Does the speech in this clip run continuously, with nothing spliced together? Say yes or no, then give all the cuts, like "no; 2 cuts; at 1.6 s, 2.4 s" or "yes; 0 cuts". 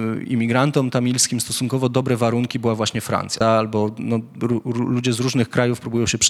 no; 1 cut; at 3.4 s